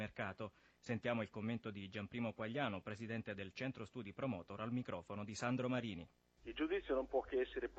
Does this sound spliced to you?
no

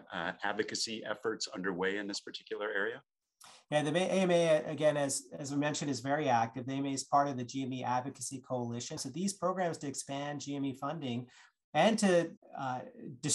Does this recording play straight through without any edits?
no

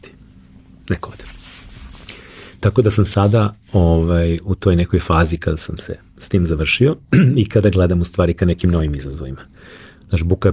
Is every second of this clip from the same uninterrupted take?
yes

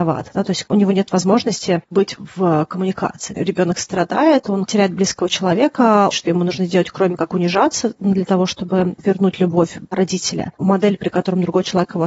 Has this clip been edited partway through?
yes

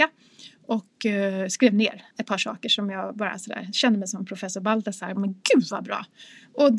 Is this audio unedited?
no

